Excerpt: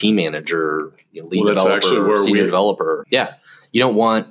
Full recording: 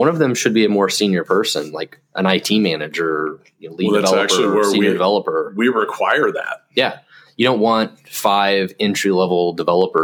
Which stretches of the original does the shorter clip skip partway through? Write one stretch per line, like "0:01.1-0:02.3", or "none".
0:05.5-0:06.7